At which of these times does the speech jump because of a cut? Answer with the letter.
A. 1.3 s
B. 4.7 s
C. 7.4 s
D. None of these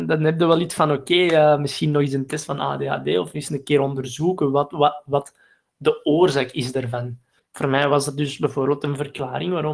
C